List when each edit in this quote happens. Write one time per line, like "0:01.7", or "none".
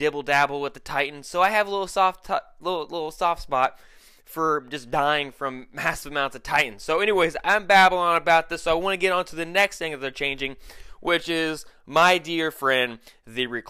none